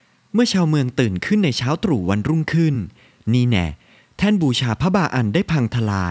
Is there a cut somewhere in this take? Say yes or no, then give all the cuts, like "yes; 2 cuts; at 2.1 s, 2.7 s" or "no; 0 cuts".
no; 0 cuts